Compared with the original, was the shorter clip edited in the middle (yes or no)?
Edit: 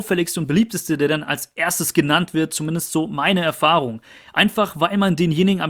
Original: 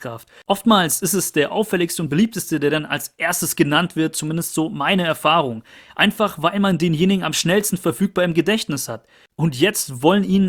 no